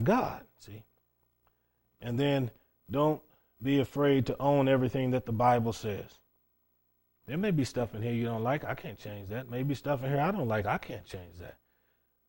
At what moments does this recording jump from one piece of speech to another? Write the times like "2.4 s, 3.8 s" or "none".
none